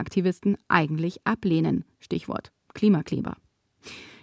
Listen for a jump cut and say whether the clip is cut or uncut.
uncut